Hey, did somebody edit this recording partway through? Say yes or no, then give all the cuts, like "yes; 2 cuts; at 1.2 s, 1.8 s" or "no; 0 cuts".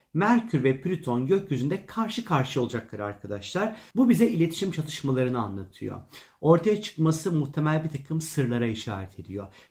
yes; 1 cut; at 3.9 s